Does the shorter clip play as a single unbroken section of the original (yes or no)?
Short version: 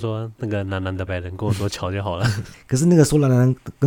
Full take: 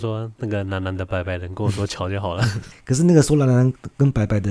no